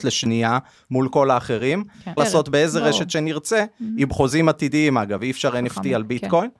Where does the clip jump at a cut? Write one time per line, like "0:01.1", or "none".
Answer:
0:02.2